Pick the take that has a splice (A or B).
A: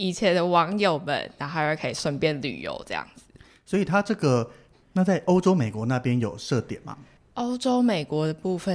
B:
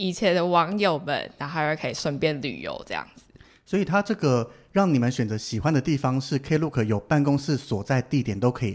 A